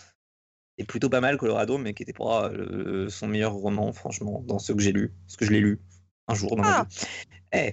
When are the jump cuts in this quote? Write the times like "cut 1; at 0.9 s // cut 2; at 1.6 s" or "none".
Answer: none